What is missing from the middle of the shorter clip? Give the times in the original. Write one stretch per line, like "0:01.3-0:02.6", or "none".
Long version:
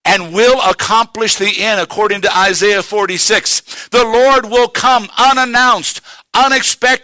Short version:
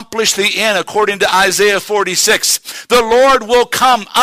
none

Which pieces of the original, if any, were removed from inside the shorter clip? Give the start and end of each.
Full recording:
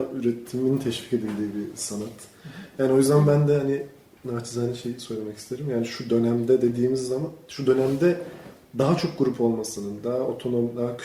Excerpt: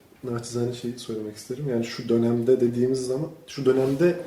none

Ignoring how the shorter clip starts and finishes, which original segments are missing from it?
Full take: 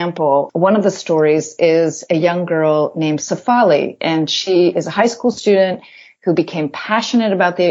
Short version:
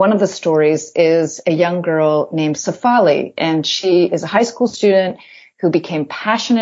none

